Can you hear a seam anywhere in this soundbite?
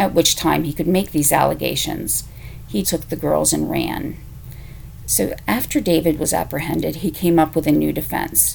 yes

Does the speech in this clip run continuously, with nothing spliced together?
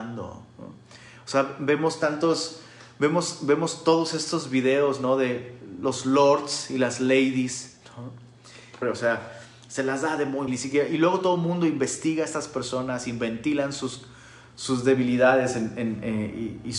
no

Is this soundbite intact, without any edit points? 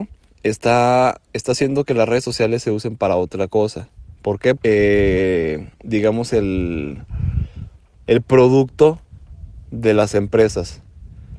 no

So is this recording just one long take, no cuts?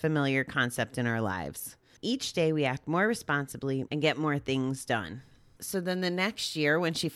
no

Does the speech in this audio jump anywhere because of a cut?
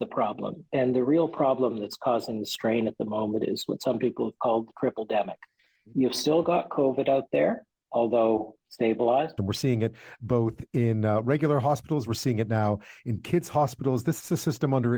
yes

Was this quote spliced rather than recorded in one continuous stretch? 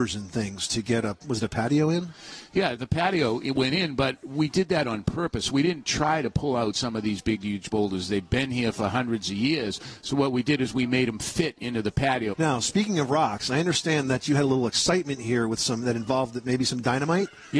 yes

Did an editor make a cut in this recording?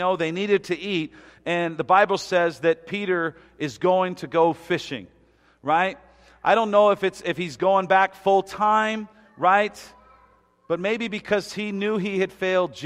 no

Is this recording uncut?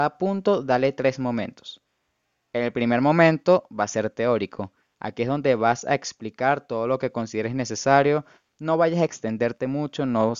yes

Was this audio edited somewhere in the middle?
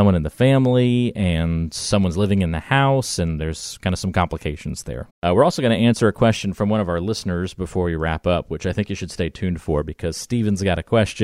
yes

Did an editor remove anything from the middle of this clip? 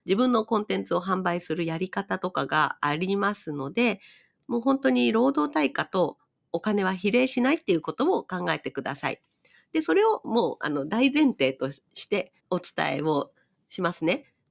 yes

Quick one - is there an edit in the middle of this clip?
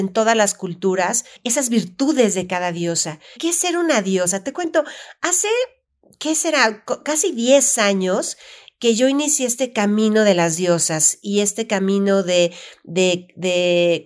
yes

